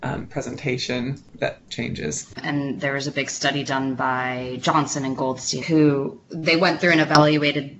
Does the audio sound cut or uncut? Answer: cut